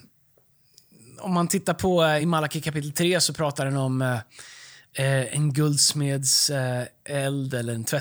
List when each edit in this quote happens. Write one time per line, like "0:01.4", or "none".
none